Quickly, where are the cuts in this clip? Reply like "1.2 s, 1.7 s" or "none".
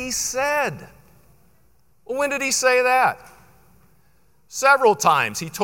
none